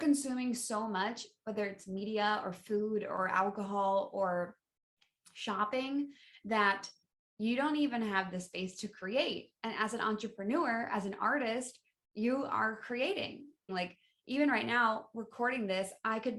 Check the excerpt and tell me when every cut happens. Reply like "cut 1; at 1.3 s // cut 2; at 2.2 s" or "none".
cut 1; at 13.7 s